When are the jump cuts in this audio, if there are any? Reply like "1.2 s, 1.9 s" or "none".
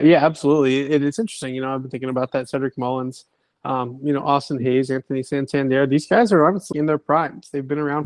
6.7 s